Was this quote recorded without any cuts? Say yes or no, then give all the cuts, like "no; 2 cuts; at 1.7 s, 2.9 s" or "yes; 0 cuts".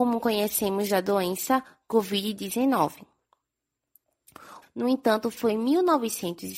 no; 1 cut; at 4.6 s